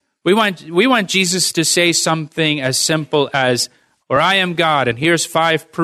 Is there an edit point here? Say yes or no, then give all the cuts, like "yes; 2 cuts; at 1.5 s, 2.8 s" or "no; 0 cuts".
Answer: yes; 1 cut; at 4.0 s